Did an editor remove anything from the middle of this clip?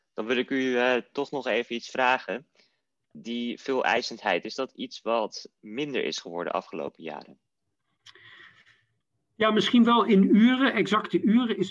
no; 0 cuts

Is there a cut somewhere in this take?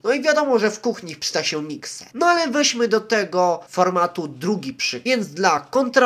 yes; 1 cut; at 2.1 s

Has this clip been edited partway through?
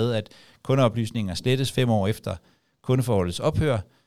no; 0 cuts

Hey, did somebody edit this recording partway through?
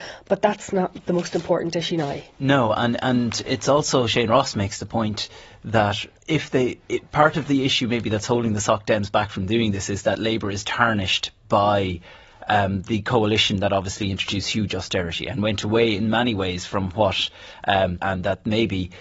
yes; 2 cuts; at 6.1 s, 18.0 s

